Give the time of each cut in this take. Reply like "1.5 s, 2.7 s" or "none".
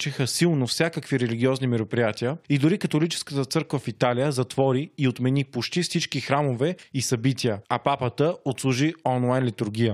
none